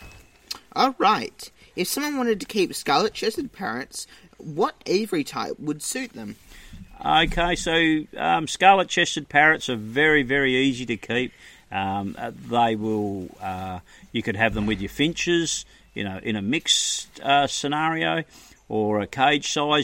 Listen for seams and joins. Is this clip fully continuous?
yes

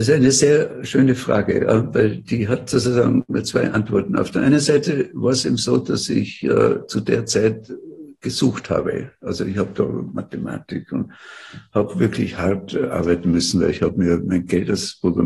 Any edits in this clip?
no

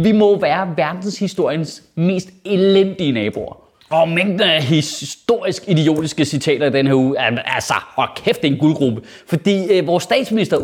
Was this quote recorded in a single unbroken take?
yes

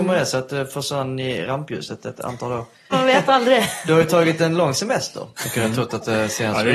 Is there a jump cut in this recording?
yes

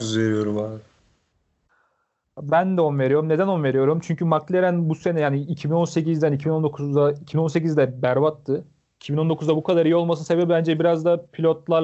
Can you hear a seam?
no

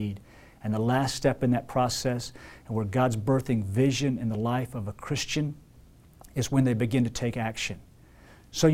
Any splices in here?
no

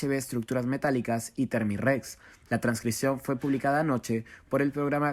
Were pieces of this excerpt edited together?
yes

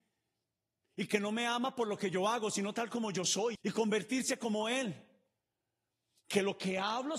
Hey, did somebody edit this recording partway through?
yes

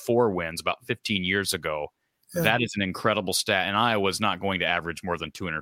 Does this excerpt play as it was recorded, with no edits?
yes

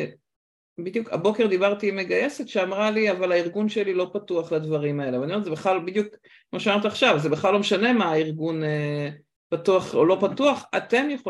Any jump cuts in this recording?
no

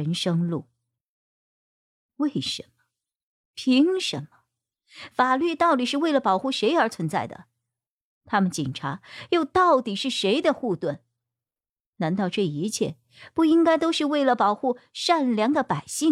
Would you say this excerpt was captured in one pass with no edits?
yes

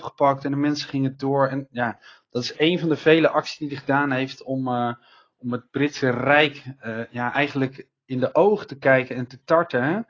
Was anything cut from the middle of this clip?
no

